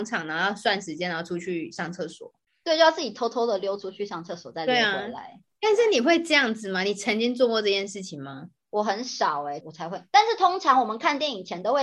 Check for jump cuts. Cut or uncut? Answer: cut